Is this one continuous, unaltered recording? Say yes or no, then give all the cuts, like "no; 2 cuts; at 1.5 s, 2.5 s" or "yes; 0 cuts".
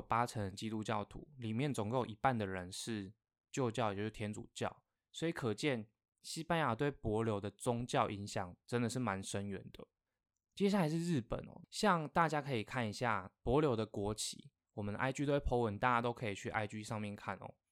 yes; 0 cuts